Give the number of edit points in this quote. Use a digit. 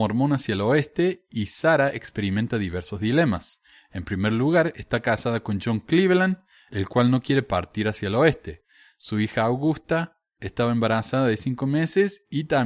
1